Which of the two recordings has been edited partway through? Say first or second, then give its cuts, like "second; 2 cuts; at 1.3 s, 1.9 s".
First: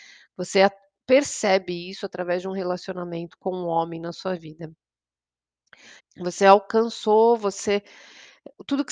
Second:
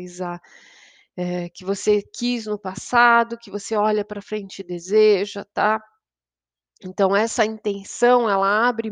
first; 1 cut; at 6.0 s